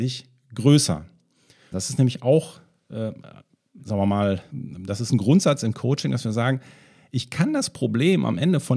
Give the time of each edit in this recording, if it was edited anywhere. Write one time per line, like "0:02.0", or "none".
0:01.7
0:04.5